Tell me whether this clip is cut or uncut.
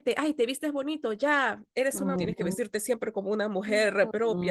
cut